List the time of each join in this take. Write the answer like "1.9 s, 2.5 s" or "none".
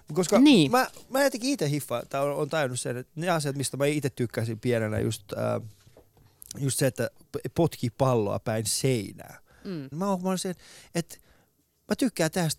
9.9 s